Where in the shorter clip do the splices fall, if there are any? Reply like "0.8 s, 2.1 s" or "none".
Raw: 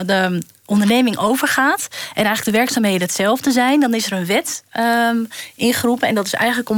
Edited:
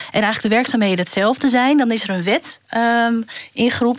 none